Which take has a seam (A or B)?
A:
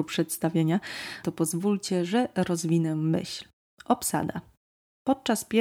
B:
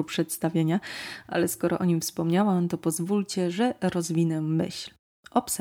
A